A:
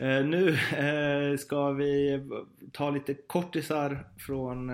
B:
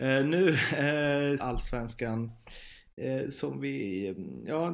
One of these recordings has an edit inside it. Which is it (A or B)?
B